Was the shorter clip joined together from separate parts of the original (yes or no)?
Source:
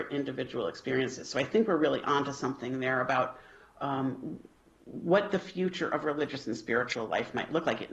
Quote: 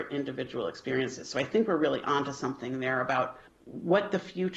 yes